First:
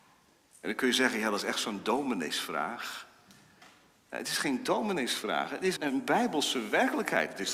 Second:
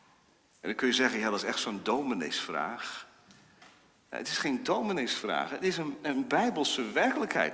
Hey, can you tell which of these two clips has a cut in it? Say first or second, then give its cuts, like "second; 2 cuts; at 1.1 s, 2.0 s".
first; 1 cut; at 5.8 s